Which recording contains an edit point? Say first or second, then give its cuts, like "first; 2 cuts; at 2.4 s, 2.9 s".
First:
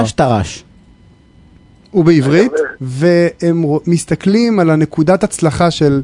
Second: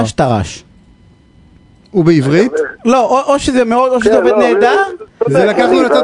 first; 1 cut; at 2.8 s